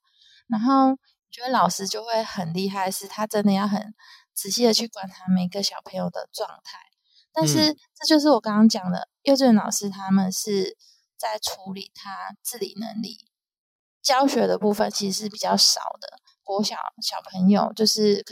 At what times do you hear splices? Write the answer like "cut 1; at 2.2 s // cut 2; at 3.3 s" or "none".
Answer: cut 1; at 16.3 s

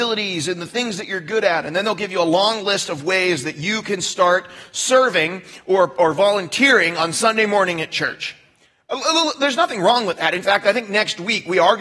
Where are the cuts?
none

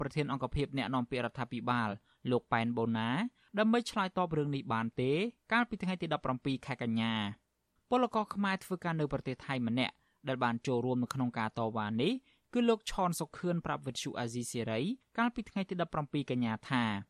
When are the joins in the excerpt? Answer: none

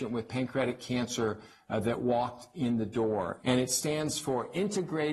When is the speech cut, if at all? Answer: cut 1; at 3.4 s

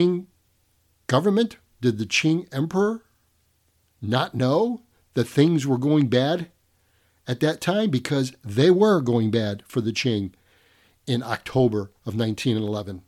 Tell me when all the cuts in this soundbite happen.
none

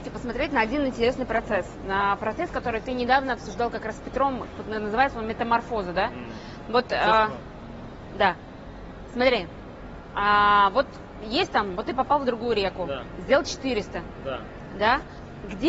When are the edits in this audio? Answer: none

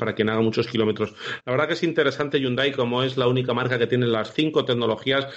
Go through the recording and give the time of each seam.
none

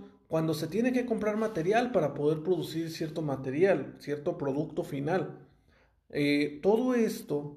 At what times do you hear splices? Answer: none

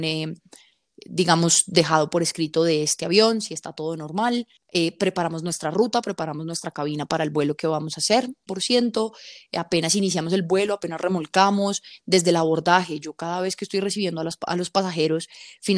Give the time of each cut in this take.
cut 1; at 8.5 s

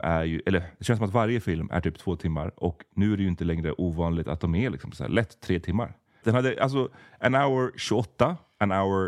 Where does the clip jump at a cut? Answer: cut 1; at 6.2 s

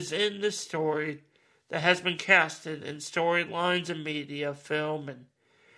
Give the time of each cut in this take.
none

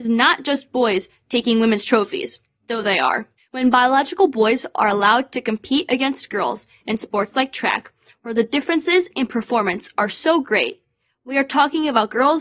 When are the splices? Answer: cut 1; at 3.4 s

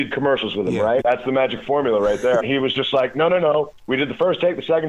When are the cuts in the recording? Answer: cut 1; at 1.0 s // cut 2; at 2.4 s

